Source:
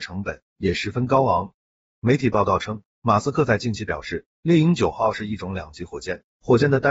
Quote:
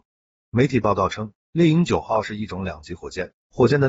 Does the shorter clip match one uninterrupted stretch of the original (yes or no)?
no